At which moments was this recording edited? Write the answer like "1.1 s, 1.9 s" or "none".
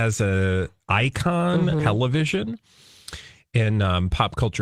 1.8 s